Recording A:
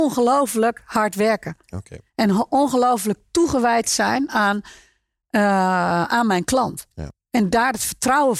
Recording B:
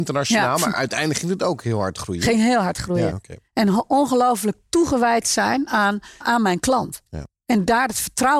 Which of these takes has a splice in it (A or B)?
B